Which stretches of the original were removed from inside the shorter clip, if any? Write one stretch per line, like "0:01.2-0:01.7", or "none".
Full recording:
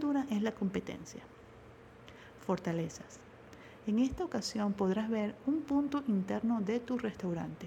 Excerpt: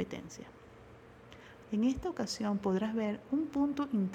0:02.4-0:03.8